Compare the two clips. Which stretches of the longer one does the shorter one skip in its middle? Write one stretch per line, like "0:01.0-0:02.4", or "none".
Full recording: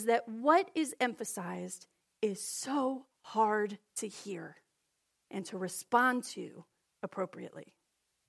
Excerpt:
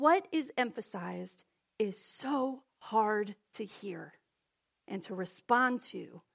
none